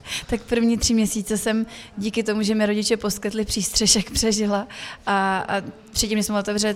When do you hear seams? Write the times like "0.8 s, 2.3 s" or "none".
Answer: none